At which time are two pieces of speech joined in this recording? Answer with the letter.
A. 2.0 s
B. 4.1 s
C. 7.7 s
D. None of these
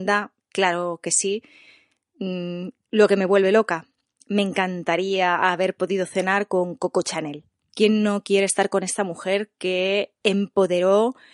C